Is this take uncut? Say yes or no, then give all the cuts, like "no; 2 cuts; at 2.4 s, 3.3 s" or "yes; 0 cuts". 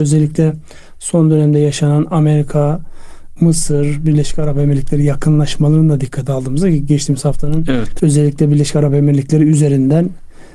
no; 2 cuts; at 3.4 s, 8.0 s